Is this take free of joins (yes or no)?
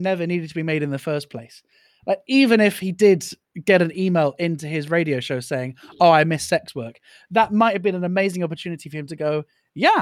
yes